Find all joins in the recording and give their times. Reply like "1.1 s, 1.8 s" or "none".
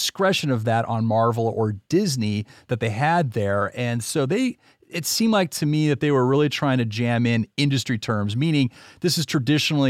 none